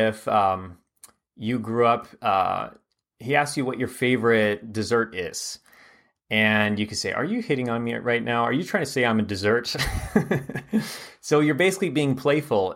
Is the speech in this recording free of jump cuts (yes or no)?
yes